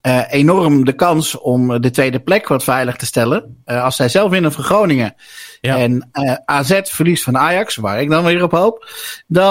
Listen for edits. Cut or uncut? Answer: uncut